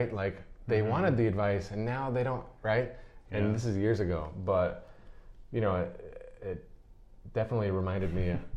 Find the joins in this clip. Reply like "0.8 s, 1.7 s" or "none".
none

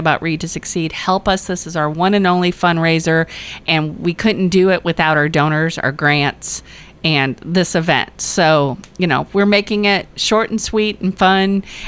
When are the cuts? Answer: none

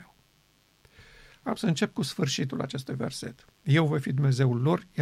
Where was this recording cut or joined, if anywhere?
none

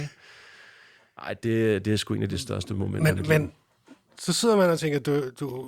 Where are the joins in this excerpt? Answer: none

